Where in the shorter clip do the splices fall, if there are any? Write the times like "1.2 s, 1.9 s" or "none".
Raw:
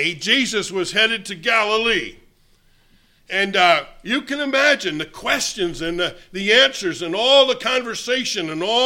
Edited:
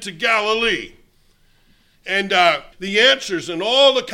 2.7 s

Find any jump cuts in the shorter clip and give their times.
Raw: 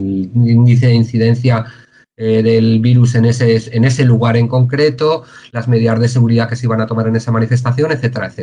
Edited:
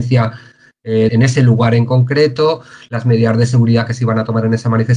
1.1 s

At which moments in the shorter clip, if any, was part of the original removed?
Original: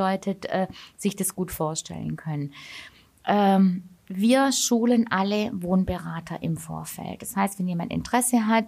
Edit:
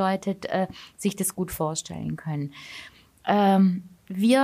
none

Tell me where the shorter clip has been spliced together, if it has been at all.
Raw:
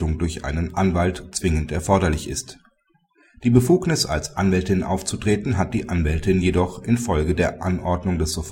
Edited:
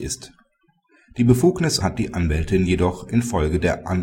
1.8 s

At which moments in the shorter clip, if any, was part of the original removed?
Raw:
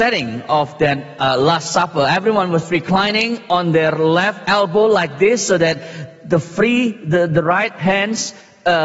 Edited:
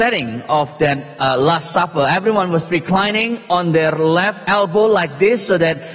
none

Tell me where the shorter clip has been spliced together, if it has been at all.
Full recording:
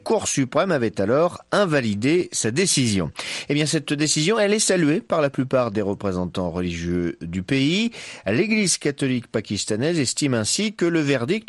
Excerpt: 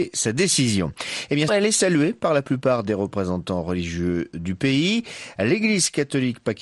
1.5 s

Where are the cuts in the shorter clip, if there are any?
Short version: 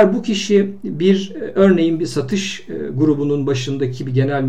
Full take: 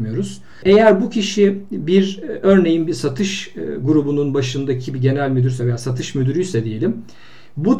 none

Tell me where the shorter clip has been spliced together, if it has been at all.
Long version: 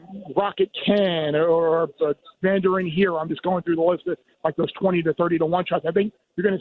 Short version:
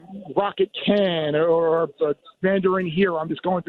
none

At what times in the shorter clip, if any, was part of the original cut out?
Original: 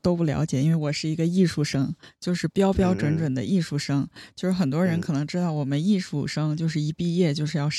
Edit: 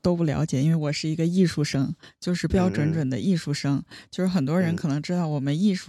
2.5 s

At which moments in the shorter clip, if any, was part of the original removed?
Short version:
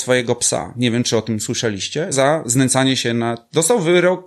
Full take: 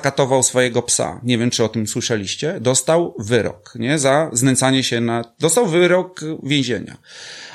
2.1 s

